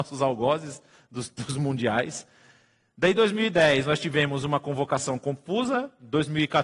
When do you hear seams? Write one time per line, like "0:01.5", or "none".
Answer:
none

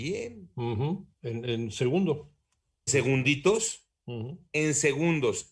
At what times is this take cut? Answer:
0:01.1
0:02.9

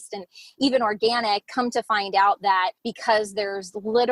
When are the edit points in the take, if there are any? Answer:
0:01.4
0:02.8

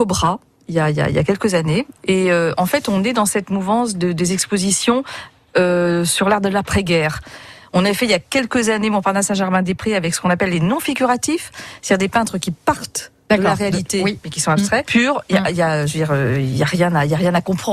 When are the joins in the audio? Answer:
0:14.8

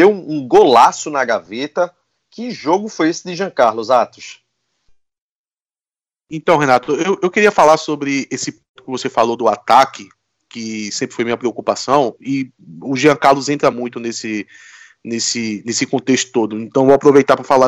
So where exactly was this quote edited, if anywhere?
none

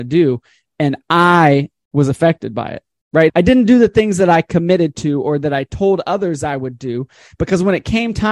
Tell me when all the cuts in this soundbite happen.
0:03.3

